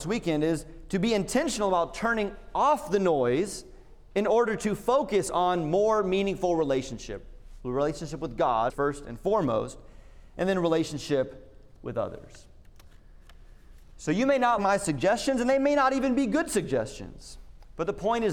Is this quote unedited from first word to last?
no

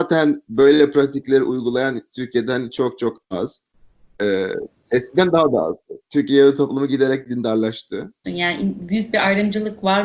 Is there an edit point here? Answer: yes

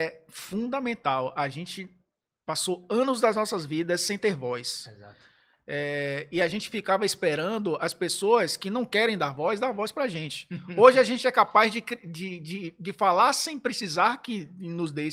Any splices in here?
no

